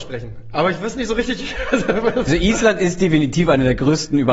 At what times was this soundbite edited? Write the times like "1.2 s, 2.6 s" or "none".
2.3 s